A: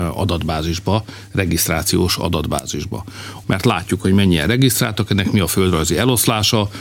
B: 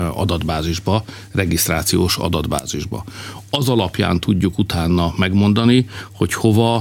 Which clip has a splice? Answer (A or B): A